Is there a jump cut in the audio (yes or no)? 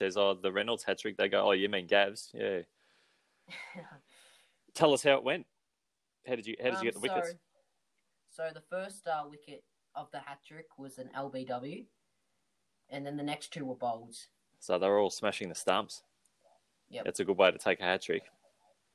yes